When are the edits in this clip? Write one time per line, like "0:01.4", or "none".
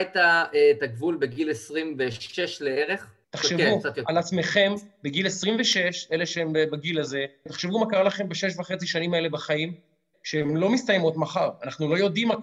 0:03.2
0:07.5
0:10.1